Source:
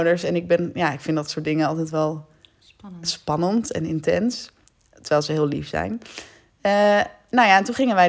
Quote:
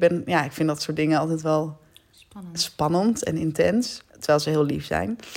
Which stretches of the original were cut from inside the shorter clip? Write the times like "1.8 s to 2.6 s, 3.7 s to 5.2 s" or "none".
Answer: 4.6 s to 4.9 s